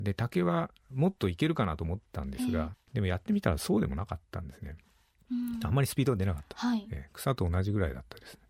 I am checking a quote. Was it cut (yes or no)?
no